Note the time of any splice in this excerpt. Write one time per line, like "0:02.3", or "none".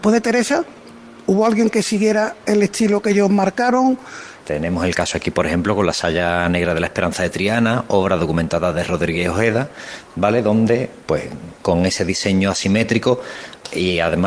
0:04.4